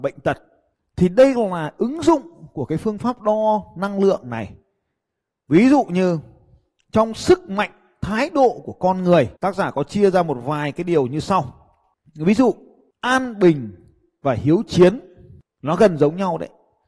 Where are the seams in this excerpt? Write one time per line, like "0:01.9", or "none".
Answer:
0:09.4